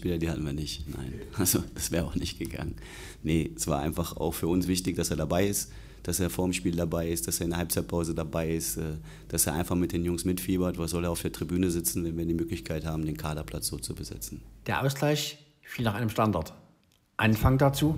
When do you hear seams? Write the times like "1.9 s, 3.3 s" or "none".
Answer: none